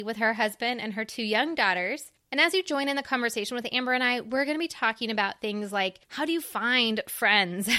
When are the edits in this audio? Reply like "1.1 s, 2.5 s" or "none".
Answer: none